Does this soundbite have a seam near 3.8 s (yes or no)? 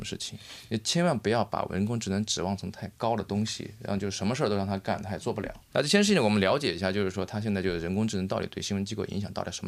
no